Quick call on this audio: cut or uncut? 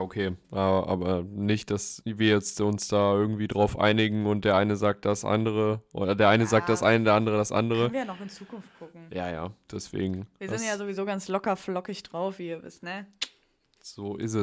uncut